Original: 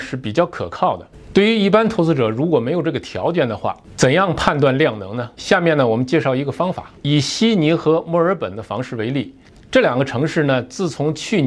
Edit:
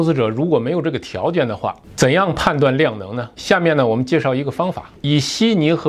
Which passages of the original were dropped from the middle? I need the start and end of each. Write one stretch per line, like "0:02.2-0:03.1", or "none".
none

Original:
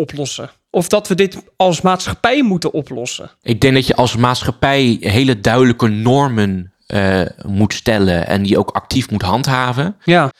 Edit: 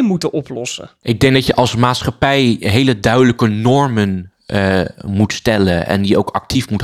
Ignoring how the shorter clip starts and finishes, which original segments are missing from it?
none

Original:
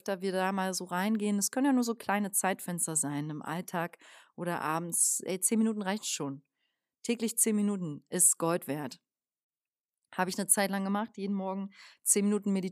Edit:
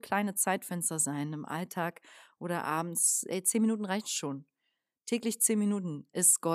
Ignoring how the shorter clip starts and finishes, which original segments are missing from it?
none

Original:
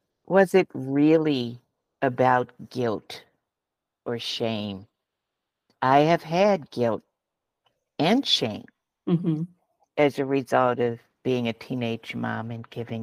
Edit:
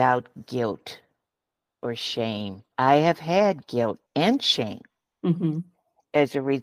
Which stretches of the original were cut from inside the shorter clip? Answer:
0:04.9-0:05.8
0:07.1-0:07.9

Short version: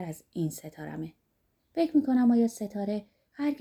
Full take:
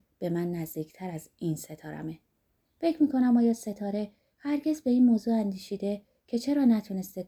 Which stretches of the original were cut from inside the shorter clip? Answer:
none

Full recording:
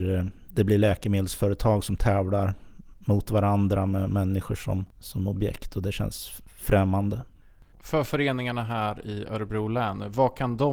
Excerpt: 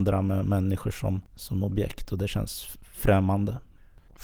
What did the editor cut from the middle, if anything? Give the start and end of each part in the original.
none

